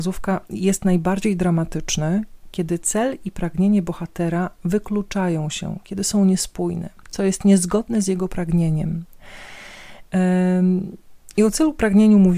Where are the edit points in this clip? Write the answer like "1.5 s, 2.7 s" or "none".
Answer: 7.0 s